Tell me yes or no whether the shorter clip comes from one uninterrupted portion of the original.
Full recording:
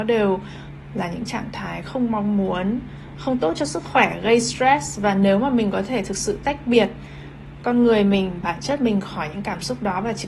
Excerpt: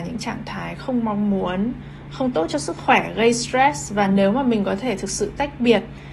yes